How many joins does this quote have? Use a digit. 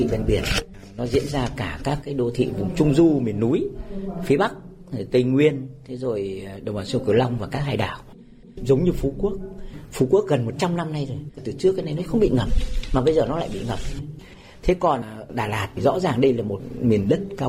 0